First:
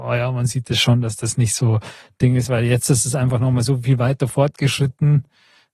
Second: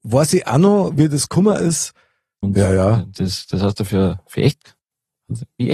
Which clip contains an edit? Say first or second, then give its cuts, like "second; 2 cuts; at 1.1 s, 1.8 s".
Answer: second; 1 cut; at 2.4 s